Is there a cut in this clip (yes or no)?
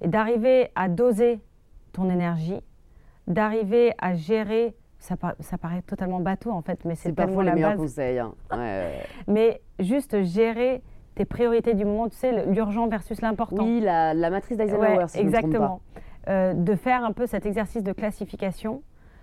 no